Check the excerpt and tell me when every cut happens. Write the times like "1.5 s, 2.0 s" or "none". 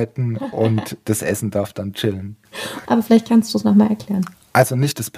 2.9 s